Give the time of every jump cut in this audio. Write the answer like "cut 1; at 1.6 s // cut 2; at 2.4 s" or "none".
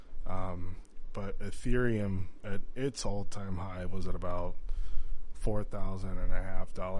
none